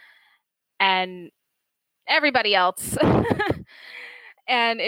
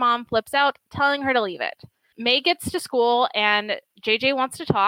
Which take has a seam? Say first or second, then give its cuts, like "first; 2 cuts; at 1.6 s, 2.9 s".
second; 1 cut; at 2.1 s